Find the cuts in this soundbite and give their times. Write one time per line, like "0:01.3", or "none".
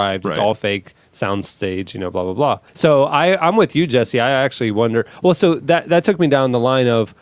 0:02.7